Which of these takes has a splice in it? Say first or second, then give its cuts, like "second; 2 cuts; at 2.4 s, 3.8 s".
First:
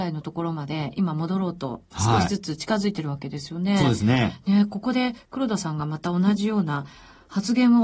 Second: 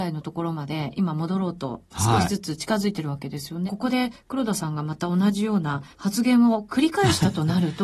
second; 2 cuts; at 3.7 s, 5.9 s